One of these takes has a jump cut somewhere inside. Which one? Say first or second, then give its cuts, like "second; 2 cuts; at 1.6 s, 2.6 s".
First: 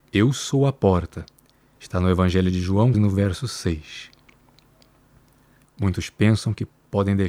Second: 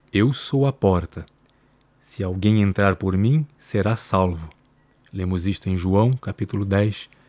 first; 3 cuts; at 1.8 s, 2.9 s, 5.7 s